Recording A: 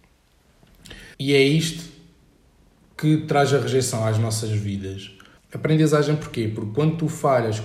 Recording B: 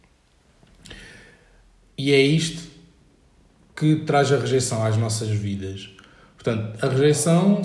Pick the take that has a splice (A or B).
A